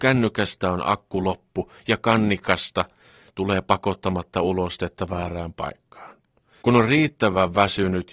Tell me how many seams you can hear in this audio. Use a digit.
1